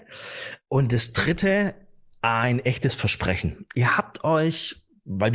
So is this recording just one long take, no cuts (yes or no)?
yes